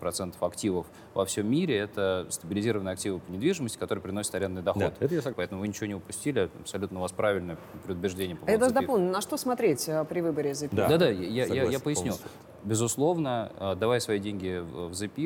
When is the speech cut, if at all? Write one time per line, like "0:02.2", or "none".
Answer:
0:05.3